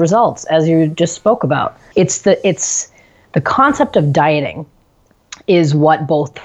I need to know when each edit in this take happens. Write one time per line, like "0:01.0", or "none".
0:01.9

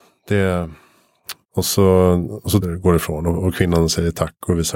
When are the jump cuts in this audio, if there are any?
0:01.4
0:02.6

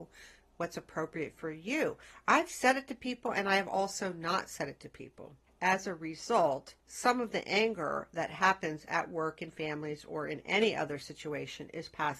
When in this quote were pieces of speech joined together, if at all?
0:05.5
0:06.8

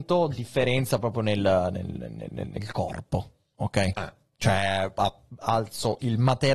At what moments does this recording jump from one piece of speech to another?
0:04.3

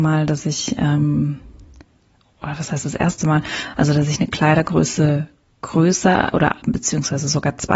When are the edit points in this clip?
none

